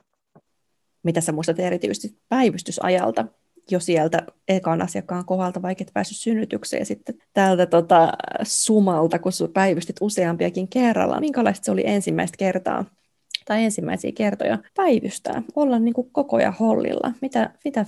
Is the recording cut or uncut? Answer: cut